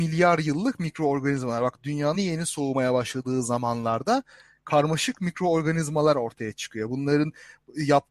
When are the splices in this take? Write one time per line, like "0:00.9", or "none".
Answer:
0:02.1

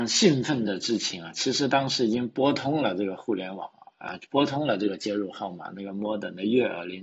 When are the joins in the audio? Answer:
none

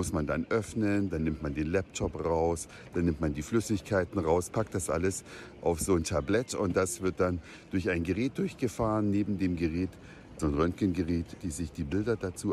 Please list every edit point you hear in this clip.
0:10.4
0:11.4

